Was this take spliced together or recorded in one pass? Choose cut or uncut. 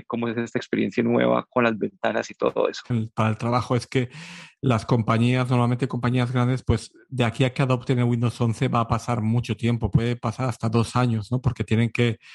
cut